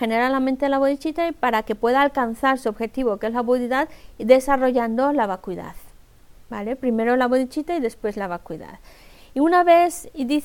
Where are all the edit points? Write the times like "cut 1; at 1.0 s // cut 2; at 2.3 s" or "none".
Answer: none